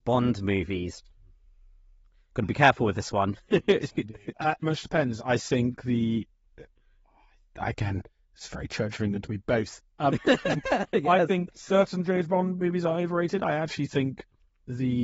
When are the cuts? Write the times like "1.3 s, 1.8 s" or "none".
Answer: 4.6 s